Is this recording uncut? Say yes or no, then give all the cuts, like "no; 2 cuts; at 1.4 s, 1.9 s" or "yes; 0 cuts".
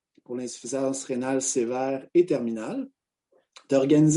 yes; 0 cuts